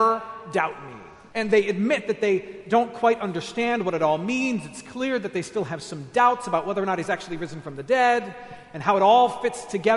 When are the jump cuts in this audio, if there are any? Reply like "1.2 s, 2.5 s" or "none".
1.3 s